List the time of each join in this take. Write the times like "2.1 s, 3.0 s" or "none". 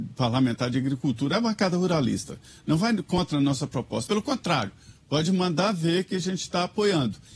4.1 s